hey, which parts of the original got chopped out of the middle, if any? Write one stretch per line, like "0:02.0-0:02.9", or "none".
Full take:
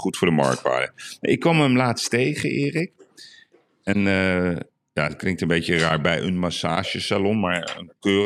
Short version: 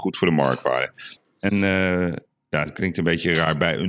0:01.2-0:03.6